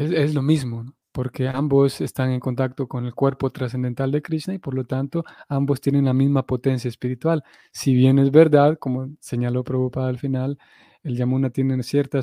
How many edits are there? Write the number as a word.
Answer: one